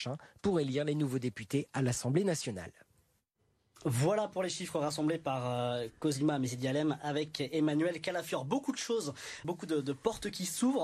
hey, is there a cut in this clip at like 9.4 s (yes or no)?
yes